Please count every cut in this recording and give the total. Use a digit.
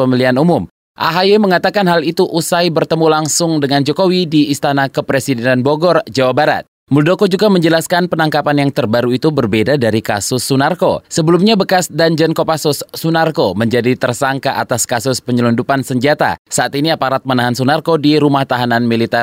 1